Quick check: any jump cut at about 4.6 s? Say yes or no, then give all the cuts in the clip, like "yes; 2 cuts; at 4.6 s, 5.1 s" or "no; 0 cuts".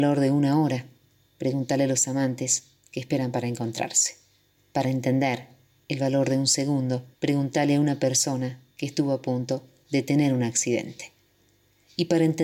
yes; 2 cuts; at 4.6 s, 7.1 s